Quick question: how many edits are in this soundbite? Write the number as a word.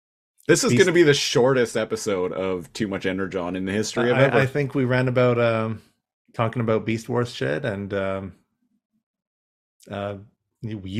one